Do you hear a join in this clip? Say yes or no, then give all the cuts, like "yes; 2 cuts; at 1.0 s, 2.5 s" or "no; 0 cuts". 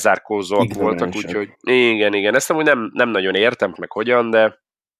yes; 2 cuts; at 1.5 s, 3.7 s